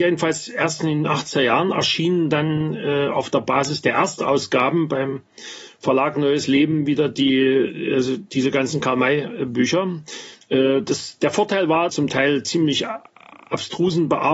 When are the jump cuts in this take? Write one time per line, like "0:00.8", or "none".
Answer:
0:10.4
0:11.9